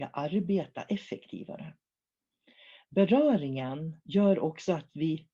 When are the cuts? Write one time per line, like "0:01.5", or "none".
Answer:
0:04.0